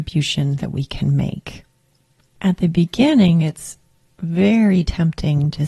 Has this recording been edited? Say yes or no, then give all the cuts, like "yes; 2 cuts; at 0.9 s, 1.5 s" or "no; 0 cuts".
no; 0 cuts